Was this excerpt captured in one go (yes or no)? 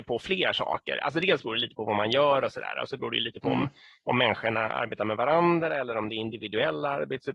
yes